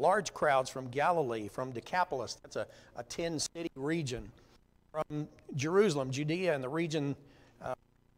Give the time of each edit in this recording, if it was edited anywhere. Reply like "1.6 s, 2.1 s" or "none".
none